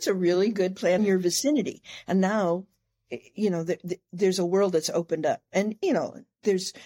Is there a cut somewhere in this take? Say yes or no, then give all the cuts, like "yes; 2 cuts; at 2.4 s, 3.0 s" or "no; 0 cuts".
yes; 1 cut; at 1.0 s